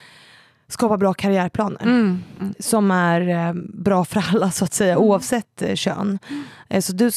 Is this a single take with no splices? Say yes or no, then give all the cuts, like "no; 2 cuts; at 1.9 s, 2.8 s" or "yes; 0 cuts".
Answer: yes; 0 cuts